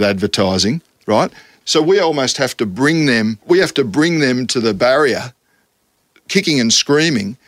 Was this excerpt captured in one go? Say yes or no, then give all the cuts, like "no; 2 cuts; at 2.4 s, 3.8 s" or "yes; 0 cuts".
no; 2 cuts; at 1.6 s, 3.4 s